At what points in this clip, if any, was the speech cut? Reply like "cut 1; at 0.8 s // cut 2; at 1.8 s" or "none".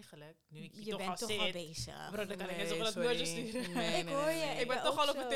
none